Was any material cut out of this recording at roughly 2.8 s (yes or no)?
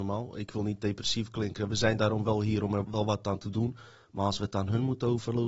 yes